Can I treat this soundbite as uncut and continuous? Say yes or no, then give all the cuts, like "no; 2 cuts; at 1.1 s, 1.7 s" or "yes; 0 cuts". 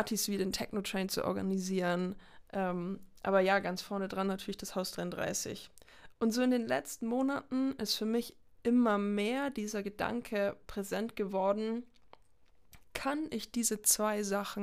yes; 0 cuts